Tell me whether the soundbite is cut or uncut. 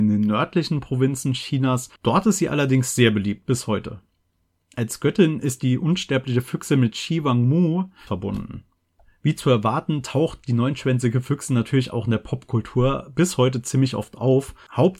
cut